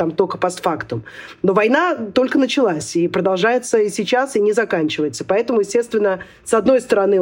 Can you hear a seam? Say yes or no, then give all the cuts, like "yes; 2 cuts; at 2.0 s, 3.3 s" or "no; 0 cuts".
no; 0 cuts